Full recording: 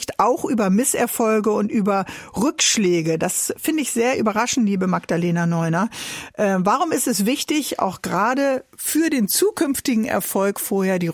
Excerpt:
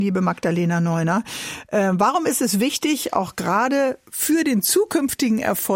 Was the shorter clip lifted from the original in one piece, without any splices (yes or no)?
yes